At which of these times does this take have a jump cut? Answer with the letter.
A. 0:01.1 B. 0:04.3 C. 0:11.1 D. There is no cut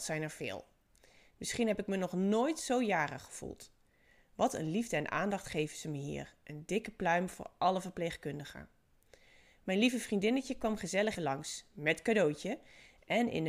C